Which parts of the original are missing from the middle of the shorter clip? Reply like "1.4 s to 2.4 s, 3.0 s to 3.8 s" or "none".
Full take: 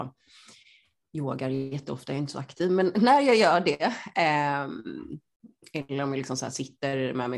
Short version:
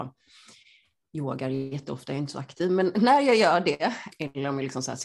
4.1 s to 5.7 s